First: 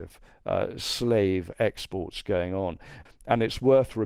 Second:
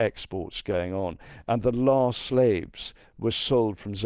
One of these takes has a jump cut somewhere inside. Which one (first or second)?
first